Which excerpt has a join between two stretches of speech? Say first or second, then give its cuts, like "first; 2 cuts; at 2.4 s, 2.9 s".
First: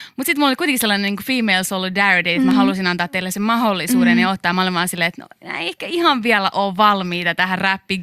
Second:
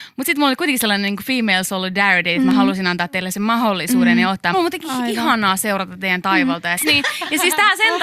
second; 2 cuts; at 4.5 s, 6.8 s